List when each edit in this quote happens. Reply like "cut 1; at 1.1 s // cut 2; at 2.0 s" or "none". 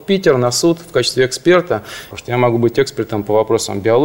cut 1; at 2.1 s